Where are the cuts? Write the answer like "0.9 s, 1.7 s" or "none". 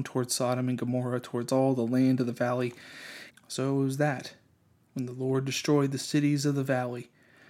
3.3 s

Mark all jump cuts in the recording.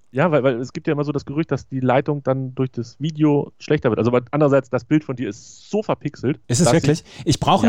6.4 s

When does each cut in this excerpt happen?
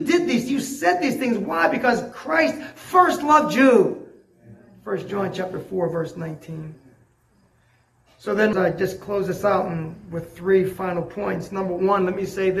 8.5 s

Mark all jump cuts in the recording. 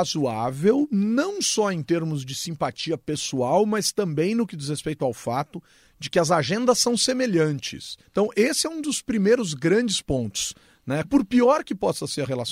8.0 s, 11.0 s

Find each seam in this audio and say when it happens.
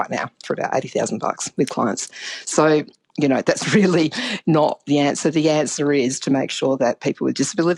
none

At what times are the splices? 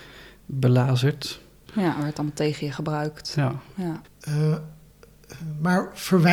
1.7 s, 4.1 s

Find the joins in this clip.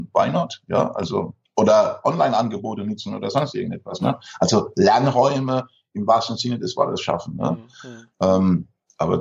none

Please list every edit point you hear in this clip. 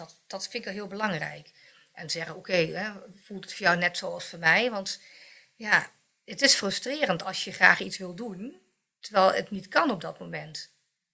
none

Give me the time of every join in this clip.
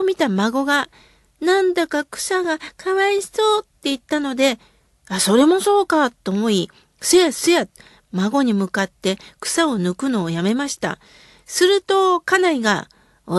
none

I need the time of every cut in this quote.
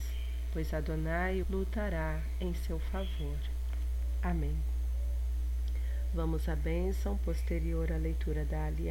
1.4 s

